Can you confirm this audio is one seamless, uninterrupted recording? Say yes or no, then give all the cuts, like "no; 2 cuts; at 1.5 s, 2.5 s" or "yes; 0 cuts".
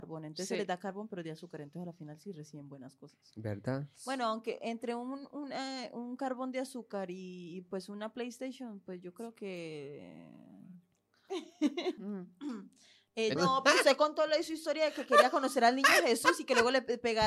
no; 2 cuts; at 12.0 s, 13.4 s